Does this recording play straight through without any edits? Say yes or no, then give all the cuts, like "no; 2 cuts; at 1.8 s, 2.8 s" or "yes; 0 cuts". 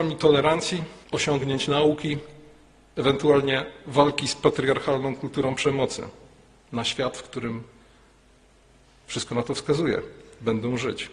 no; 2 cuts; at 1.0 s, 6.7 s